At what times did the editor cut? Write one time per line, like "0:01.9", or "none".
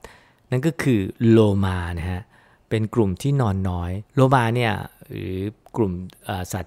0:04.1